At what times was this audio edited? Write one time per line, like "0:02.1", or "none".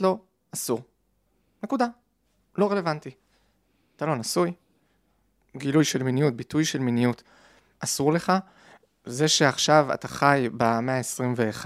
none